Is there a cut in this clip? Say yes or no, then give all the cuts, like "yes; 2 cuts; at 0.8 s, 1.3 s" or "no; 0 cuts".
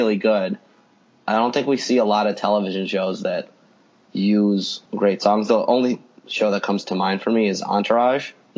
yes; 1 cut; at 4.9 s